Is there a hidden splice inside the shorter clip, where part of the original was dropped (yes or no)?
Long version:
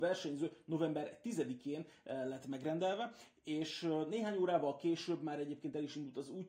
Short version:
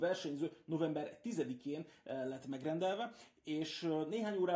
no